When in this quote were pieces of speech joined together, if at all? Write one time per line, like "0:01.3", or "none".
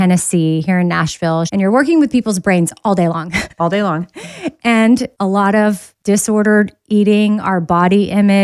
0:01.5

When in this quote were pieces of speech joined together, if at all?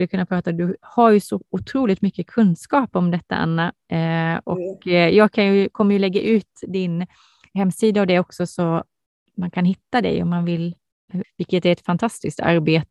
0:11.2

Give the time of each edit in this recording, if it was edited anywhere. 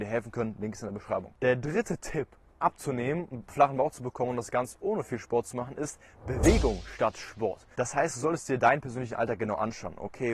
0:02.5
0:07.7

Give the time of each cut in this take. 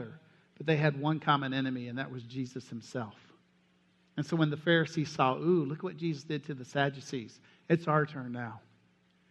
none

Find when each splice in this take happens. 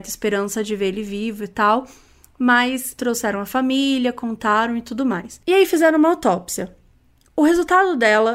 none

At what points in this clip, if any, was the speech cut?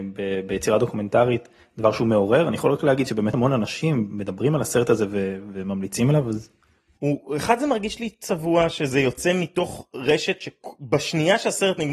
0:03.3

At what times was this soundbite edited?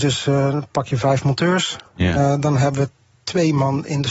none

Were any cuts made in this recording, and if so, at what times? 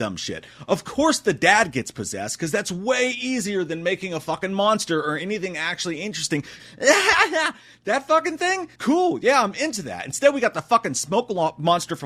0:06.6
0:08.7

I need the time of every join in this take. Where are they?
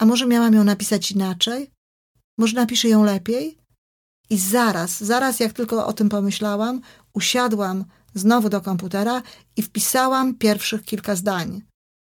none

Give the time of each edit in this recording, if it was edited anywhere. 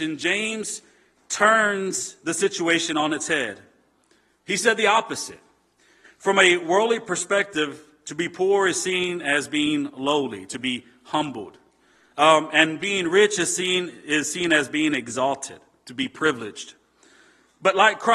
0:06.0

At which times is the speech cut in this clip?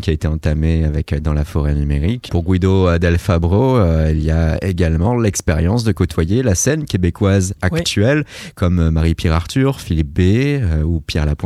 0:02.3

